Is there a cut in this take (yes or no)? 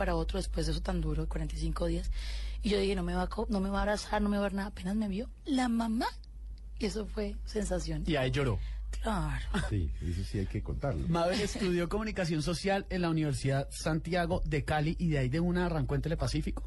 yes